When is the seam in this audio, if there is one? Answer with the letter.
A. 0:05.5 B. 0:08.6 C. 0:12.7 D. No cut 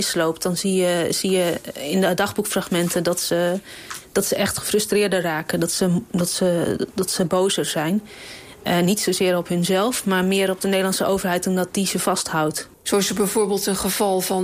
C